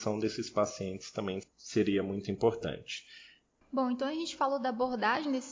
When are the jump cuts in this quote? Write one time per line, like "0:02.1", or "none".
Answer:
0:03.6